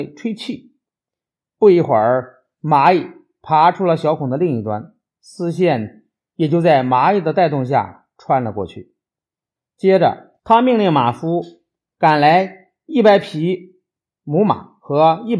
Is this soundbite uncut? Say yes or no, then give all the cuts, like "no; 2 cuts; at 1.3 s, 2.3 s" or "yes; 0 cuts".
no; 1 cut; at 10.4 s